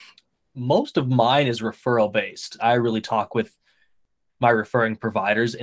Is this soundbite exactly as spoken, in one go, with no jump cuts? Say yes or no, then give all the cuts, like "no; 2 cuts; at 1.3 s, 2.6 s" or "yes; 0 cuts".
no; 1 cut; at 2.6 s